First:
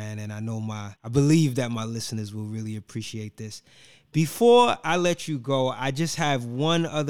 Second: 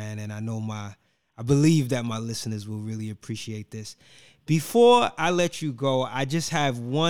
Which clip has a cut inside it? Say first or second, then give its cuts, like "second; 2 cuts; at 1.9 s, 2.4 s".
first; 1 cut; at 1.0 s